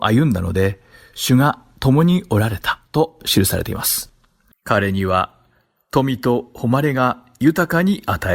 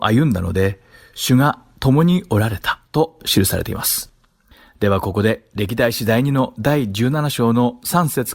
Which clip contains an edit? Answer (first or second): first